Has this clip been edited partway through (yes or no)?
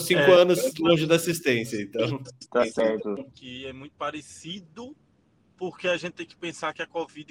yes